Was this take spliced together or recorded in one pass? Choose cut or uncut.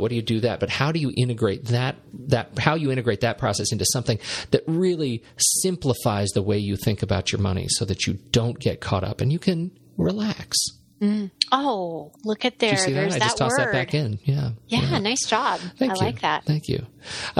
cut